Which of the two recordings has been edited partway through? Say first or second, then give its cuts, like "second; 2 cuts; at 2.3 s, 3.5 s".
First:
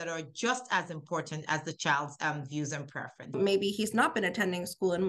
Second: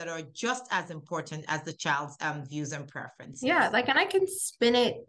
first; 1 cut; at 3.3 s